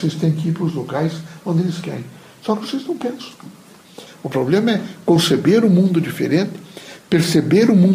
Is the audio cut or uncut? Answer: cut